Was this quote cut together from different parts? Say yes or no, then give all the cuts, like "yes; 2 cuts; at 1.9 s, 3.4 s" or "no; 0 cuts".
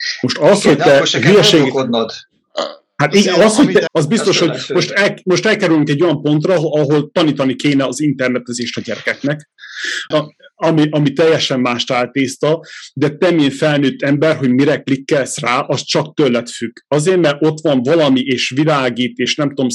yes; 2 cuts; at 3.9 s, 10.1 s